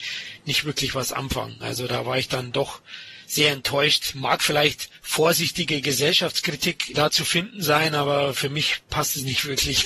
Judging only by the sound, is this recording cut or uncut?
uncut